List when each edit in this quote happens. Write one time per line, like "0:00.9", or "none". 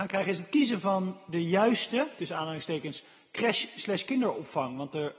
none